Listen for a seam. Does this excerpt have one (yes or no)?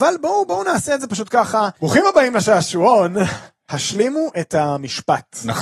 yes